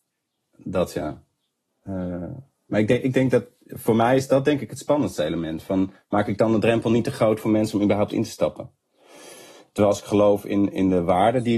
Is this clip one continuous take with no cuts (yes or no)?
no